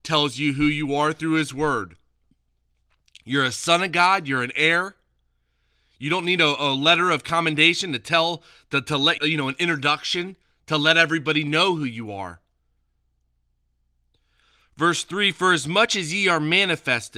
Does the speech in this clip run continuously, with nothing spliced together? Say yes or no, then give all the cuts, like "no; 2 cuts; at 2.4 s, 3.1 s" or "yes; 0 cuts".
no; 1 cut; at 9.2 s